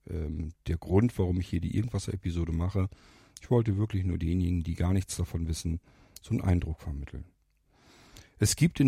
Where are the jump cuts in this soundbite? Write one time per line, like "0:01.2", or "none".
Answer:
none